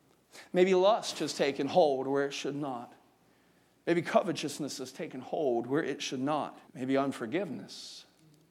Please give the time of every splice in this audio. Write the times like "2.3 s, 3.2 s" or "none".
6.7 s